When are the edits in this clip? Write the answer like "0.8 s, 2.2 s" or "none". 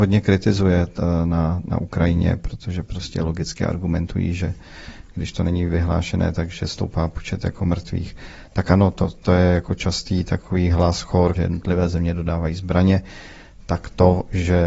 11.3 s